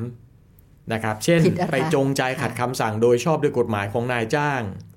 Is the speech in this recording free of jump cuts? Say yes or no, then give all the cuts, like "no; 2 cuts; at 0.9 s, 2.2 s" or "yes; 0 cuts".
no; 1 cut; at 1.7 s